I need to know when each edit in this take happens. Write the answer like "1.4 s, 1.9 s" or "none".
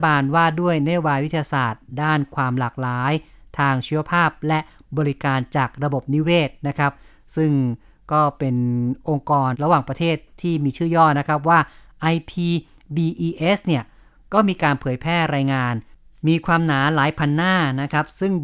9.5 s